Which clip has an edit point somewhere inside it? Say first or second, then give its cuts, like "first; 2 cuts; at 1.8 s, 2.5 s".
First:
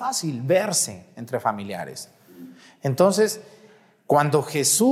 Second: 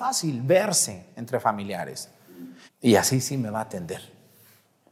second; 1 cut; at 2.7 s